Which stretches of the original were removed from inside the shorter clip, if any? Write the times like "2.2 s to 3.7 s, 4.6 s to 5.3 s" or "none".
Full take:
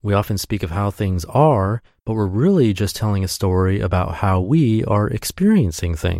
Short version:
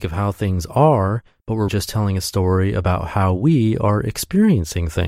2.3 s to 2.8 s